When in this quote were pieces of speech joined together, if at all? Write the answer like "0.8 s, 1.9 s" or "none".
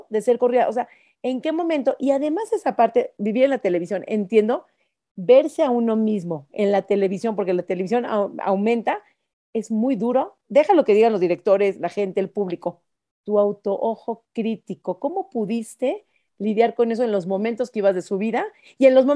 none